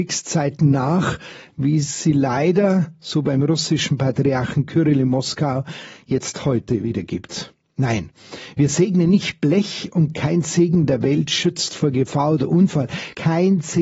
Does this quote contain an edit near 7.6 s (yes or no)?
no